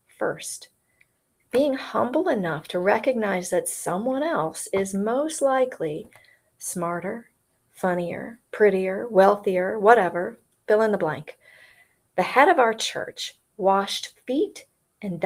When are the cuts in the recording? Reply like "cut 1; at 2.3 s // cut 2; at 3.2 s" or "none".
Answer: cut 1; at 1.4 s